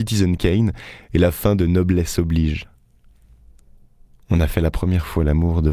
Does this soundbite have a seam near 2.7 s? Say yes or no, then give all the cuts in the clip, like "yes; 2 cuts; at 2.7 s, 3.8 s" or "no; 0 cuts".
no; 0 cuts